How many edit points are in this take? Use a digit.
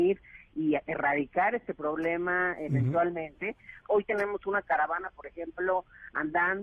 1